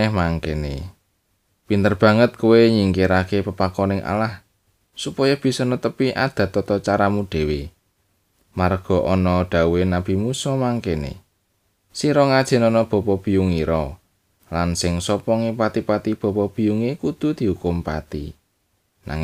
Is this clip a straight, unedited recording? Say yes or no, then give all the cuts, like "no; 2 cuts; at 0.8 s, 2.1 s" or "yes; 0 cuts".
yes; 0 cuts